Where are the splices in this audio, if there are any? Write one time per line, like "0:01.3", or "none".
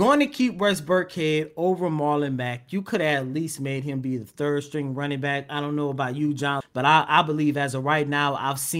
0:06.6